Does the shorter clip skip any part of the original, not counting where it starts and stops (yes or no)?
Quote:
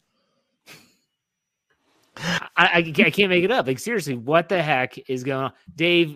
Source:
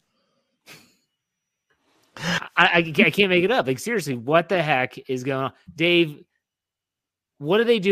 no